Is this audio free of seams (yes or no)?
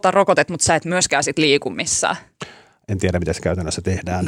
yes